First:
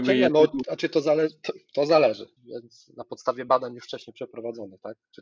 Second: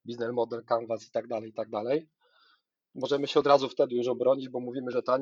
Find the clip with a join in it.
first; 1 cut; at 2.4 s

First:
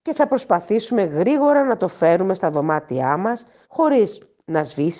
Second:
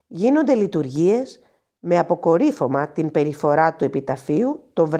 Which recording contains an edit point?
first; 1 cut; at 3.6 s

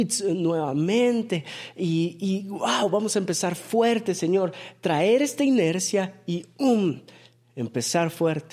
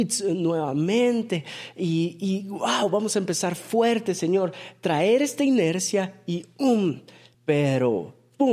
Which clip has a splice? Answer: second; 1 cut; at 7.3 s

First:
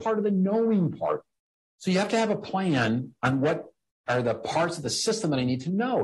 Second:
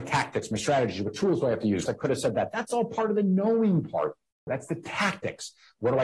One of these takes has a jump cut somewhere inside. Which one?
second; 2 cuts; at 1.9 s, 4.5 s

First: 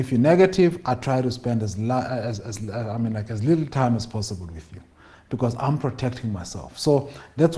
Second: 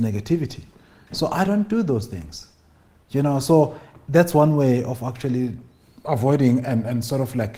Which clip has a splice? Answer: second; 1 cut; at 1.1 s

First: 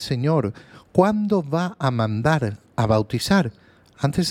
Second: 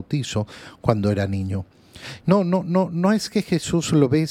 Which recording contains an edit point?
second; 1 cut; at 2.2 s

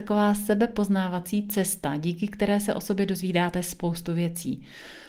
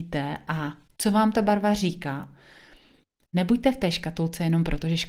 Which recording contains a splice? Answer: second; 1 cut; at 3.3 s

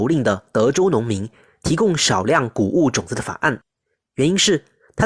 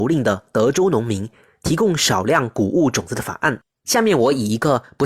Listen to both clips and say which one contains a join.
second; 1 cut; at 3.8 s

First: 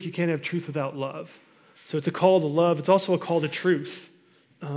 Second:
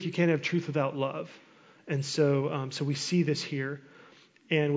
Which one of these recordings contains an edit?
first; 1 cut; at 1.7 s

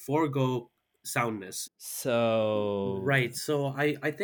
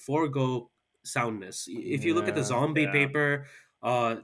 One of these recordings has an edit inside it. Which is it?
first; 1 cut; at 1.7 s

